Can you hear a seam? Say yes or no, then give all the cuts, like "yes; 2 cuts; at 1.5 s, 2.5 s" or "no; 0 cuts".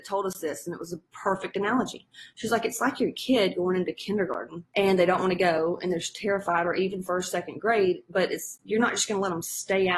no; 0 cuts